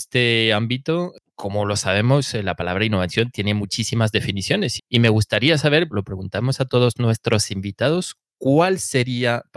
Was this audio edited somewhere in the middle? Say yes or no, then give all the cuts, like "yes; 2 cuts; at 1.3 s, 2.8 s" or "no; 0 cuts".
yes; 2 cuts; at 4.8 s, 5.9 s